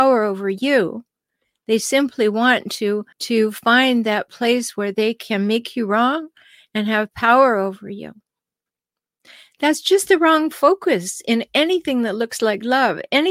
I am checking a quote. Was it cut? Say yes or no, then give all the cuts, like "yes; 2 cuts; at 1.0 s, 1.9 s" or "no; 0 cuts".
yes; 1 cut; at 3.1 s